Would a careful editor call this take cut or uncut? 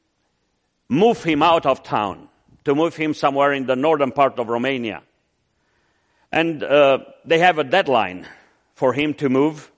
uncut